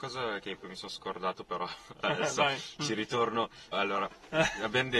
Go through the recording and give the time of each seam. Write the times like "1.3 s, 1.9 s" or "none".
3.7 s